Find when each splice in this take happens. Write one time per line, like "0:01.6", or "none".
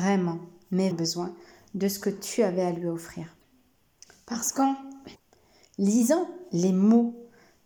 0:00.9